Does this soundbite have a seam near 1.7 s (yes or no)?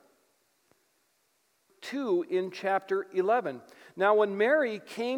yes